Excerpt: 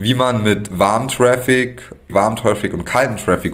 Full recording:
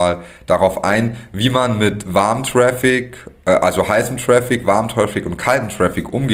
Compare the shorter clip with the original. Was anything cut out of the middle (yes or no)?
yes